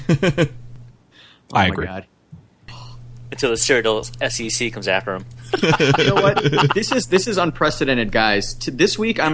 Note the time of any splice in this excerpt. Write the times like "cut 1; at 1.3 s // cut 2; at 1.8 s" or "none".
cut 1; at 6.7 s